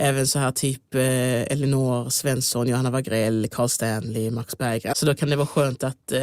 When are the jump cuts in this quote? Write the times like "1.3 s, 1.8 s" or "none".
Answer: 4.9 s